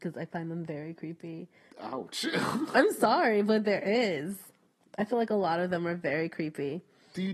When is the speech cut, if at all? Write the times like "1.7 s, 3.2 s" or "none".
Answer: 1.7 s